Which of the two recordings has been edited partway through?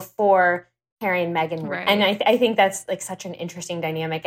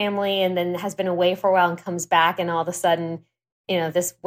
first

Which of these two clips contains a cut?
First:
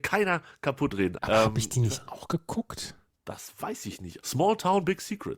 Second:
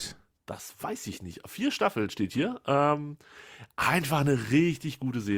first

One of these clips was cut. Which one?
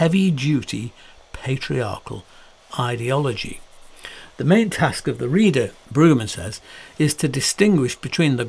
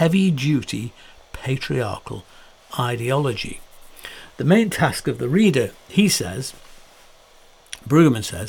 first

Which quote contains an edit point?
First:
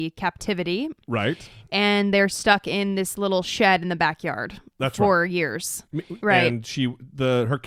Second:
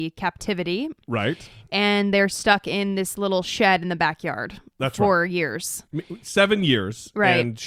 first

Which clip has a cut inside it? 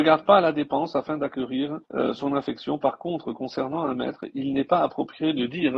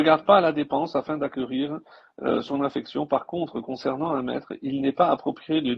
first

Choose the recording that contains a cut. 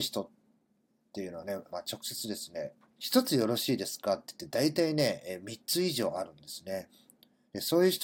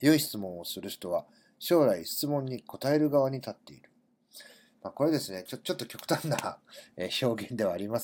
first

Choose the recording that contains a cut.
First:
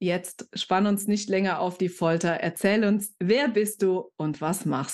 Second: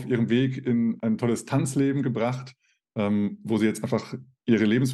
second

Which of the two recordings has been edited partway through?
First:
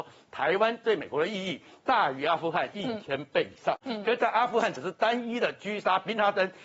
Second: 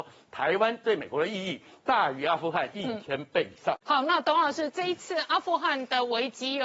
first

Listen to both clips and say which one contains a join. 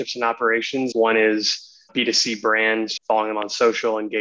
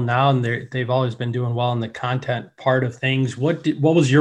first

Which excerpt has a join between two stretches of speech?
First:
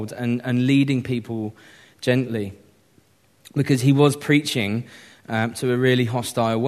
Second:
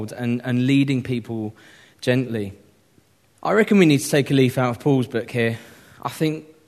second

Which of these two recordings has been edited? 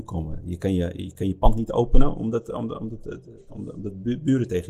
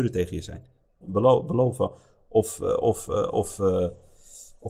second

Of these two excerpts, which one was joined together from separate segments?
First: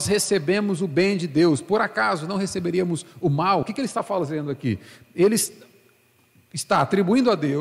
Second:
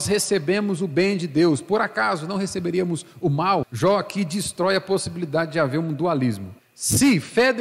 second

